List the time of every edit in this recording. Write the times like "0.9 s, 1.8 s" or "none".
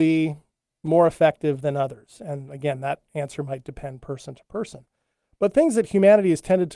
none